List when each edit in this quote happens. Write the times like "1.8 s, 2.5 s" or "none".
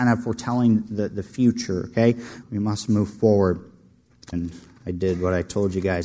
2.4 s, 4.3 s